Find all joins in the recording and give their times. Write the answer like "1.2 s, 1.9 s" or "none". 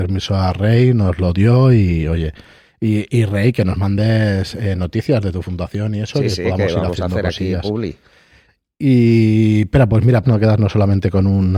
10.2 s